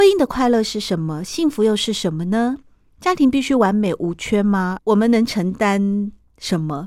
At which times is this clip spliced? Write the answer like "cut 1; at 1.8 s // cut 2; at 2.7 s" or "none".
cut 1; at 4.8 s